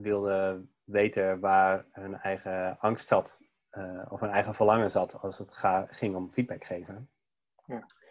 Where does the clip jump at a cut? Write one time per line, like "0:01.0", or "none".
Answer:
none